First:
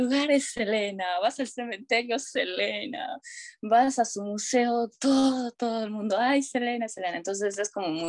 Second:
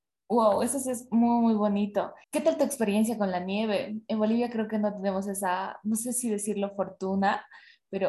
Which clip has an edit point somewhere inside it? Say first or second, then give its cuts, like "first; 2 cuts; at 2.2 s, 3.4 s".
second; 1 cut; at 2.2 s